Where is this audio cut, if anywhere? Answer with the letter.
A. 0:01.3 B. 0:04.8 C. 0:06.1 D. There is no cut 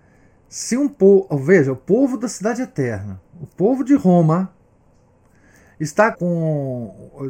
C